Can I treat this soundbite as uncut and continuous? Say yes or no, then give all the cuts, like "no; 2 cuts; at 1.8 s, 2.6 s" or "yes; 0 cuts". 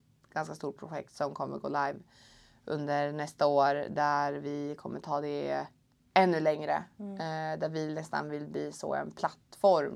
yes; 0 cuts